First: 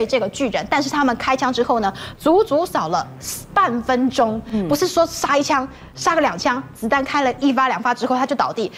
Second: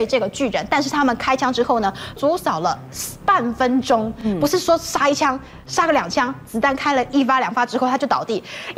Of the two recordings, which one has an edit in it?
second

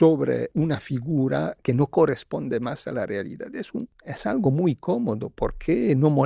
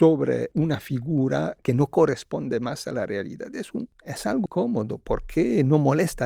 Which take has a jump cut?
second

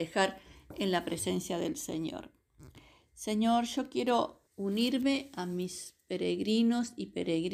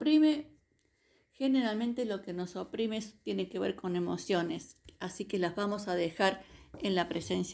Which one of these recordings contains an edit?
first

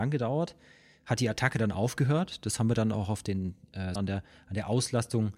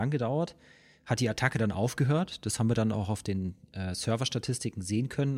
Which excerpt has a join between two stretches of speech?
first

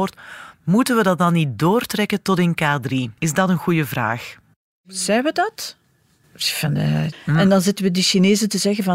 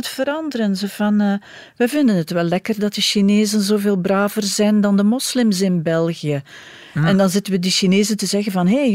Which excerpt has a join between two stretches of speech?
first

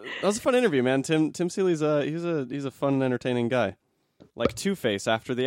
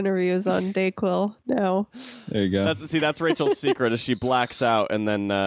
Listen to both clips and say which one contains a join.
first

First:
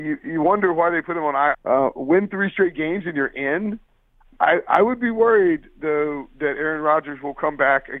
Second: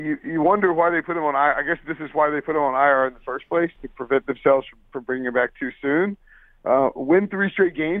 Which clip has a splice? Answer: first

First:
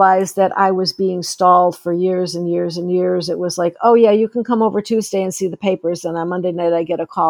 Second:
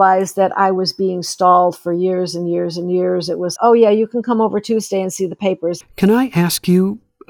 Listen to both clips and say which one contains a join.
second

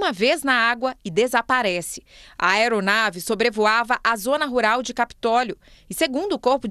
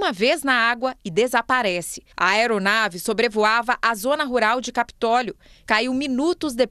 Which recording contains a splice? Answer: second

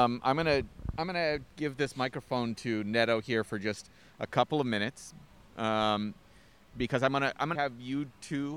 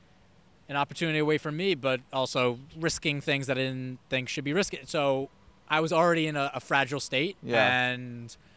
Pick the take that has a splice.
first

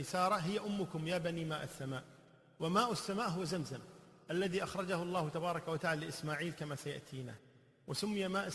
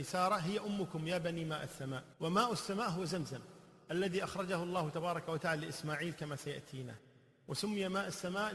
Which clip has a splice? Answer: second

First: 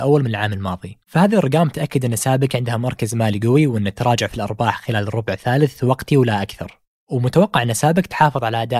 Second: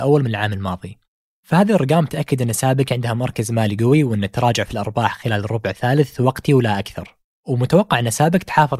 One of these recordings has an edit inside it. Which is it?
first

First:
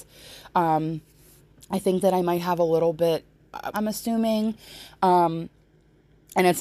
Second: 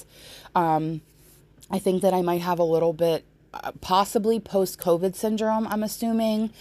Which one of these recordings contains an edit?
first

